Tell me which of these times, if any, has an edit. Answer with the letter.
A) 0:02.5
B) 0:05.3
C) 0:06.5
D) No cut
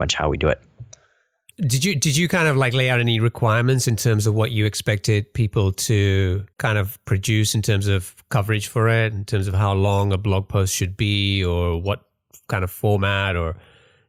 C